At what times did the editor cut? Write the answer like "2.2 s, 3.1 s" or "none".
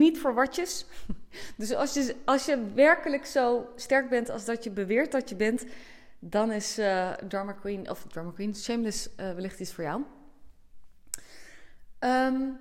none

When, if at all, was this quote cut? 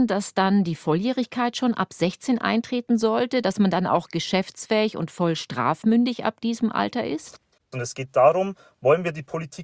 7.7 s

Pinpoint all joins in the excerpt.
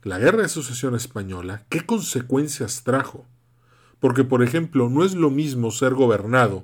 none

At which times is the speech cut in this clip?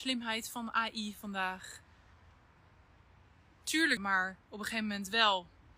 4.0 s

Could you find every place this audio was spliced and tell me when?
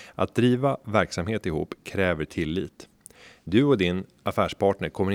none

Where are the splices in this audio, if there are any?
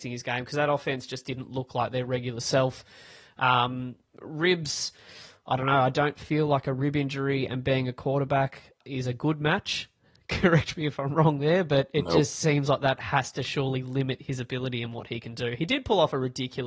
8.8 s

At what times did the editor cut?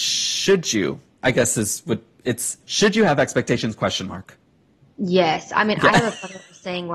4.8 s

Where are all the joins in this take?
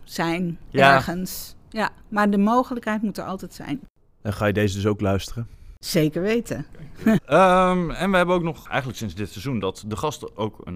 7.2 s

